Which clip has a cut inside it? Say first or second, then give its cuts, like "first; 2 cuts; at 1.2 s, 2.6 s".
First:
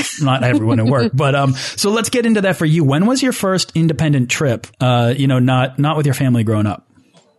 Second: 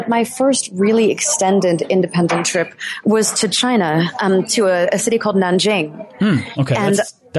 first; 1 cut; at 4.7 s